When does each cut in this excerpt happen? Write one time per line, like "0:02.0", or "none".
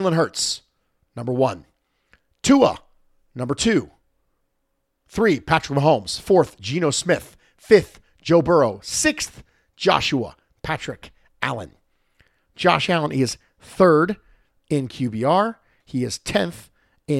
none